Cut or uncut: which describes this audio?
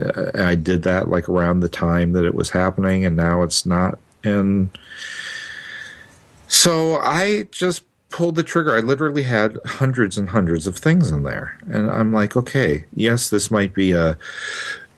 uncut